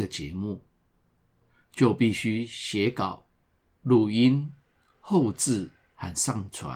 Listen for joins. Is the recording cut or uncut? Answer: uncut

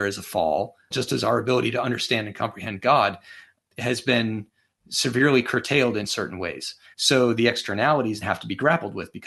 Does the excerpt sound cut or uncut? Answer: cut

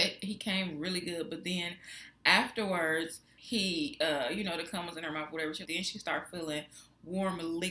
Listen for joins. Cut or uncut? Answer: cut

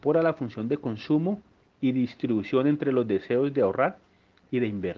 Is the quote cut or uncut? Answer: uncut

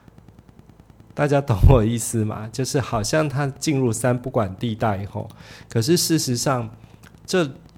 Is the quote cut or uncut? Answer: uncut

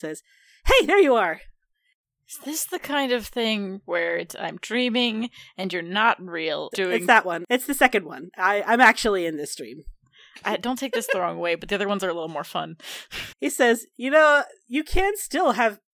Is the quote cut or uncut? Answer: cut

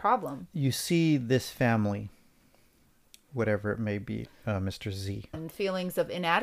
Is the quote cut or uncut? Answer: cut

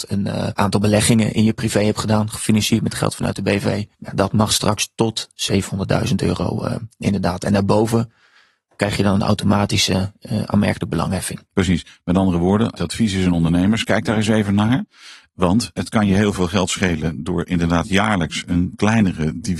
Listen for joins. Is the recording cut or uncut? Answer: cut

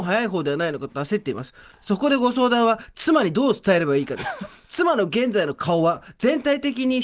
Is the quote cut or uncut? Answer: uncut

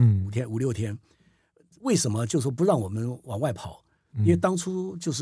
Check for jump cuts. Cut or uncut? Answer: uncut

